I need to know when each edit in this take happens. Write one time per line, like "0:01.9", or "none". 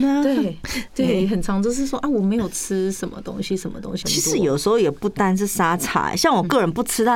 0:04.0